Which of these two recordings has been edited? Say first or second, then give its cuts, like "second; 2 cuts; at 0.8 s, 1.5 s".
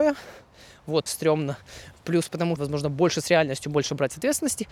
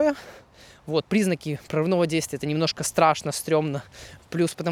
first; 2 cuts; at 1.1 s, 2.6 s